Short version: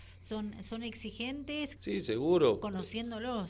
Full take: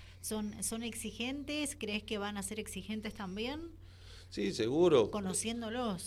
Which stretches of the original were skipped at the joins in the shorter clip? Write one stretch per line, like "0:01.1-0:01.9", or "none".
0:01.8-0:04.3